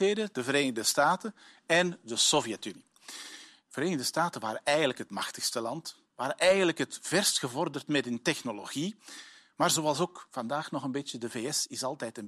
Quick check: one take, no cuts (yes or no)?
yes